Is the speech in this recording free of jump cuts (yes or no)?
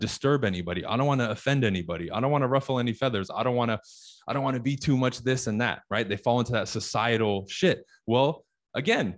yes